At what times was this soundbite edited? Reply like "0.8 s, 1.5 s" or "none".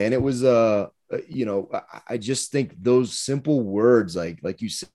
none

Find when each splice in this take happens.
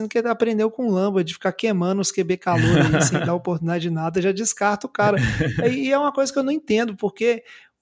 none

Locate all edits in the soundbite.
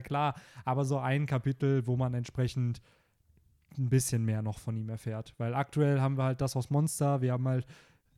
none

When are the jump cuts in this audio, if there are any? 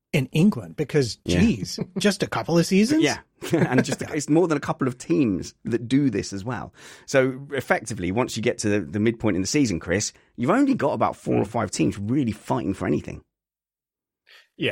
none

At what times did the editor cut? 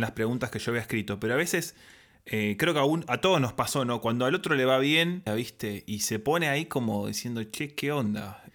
5.3 s

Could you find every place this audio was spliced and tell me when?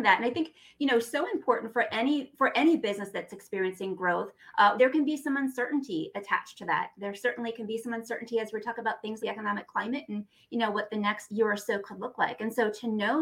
4.8 s, 9.2 s, 11.3 s

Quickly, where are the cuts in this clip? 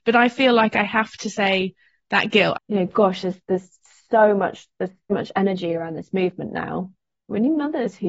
2.5 s, 5.1 s

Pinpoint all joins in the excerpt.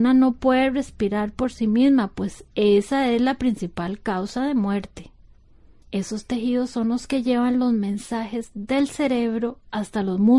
5.8 s

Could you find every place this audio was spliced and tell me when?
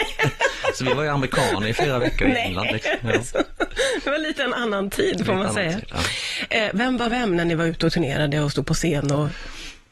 6.7 s

